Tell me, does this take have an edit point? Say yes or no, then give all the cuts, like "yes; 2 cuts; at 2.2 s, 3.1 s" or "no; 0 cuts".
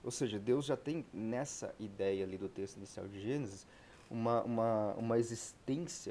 no; 0 cuts